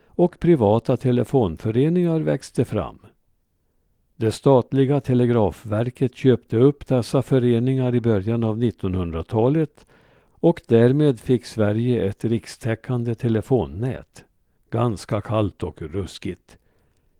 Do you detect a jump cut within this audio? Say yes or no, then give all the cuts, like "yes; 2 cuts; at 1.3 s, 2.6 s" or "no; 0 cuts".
yes; 1 cut; at 14.5 s